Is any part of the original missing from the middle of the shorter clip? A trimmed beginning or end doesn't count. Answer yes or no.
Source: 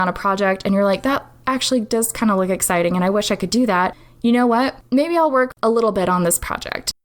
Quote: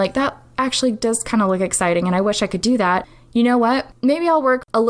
no